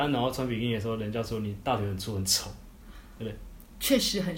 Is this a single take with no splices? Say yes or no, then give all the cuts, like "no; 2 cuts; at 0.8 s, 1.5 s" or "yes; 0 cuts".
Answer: yes; 0 cuts